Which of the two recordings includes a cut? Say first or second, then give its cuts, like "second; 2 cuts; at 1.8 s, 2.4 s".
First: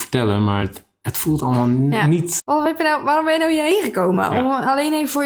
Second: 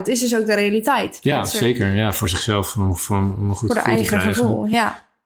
first; 1 cut; at 2.4 s